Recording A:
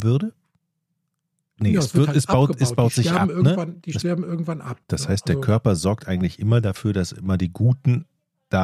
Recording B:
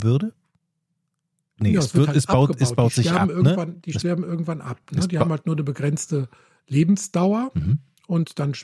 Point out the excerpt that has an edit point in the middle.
A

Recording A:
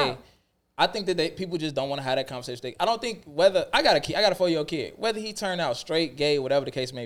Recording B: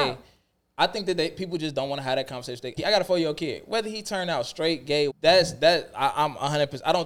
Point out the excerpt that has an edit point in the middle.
B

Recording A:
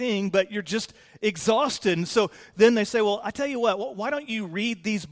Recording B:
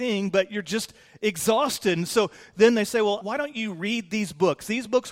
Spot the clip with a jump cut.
B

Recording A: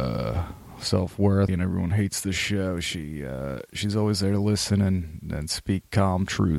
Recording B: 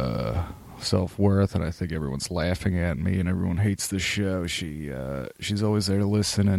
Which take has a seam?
A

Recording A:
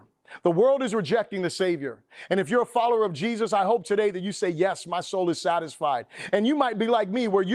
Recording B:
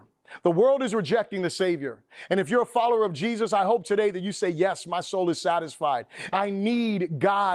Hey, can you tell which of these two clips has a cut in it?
B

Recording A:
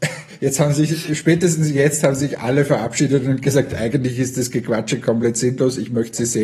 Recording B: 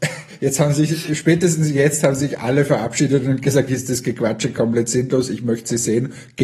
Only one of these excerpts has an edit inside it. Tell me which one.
B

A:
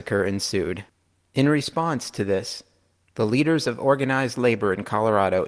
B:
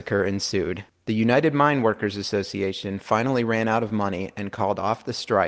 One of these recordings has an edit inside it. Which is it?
B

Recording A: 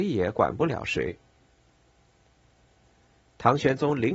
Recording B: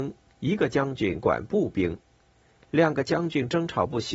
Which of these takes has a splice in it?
A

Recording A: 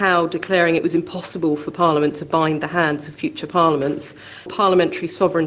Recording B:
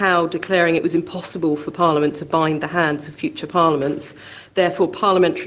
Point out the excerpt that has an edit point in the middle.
A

